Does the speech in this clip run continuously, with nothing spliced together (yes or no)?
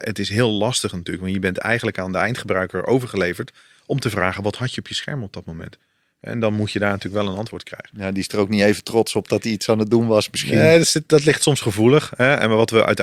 yes